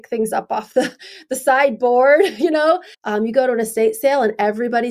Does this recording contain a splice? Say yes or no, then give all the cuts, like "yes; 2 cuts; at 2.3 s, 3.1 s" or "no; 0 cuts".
yes; 1 cut; at 2.9 s